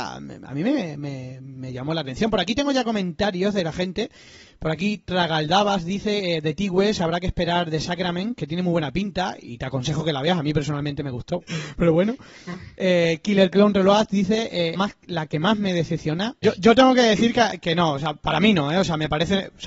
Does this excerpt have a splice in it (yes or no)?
yes